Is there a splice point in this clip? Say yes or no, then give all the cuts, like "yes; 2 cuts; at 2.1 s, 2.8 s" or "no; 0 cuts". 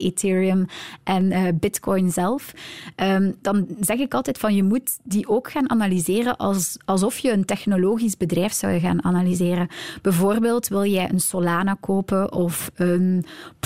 no; 0 cuts